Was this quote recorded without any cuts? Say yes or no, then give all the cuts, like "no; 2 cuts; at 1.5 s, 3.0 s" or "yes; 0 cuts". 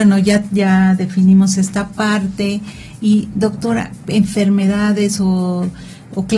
no; 1 cut; at 4.0 s